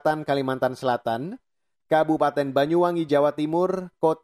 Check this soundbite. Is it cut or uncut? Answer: uncut